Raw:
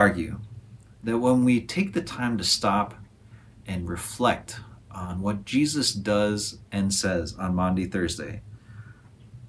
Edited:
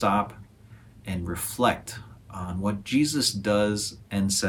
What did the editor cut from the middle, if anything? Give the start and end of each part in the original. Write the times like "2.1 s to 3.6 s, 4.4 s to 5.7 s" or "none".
none